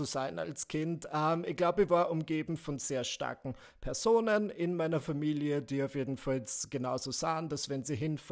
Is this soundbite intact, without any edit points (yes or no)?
yes